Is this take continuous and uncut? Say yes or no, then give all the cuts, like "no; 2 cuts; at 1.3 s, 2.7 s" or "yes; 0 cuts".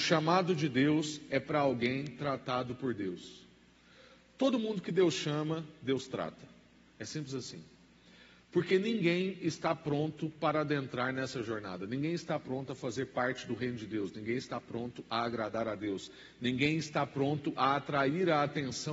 yes; 0 cuts